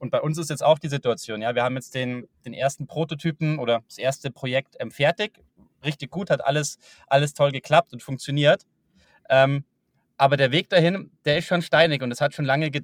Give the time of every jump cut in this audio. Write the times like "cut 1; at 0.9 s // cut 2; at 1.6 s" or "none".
none